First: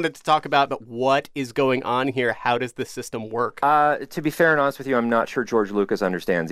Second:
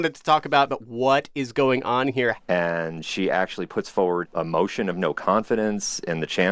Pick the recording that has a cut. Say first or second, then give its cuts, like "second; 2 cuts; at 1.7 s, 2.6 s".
second; 1 cut; at 2.4 s